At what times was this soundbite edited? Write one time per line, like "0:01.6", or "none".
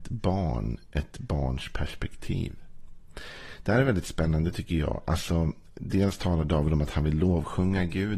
none